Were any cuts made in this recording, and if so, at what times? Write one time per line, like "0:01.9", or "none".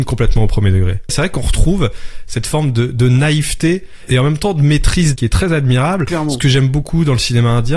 0:01.1